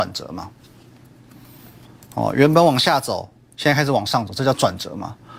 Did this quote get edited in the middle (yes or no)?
no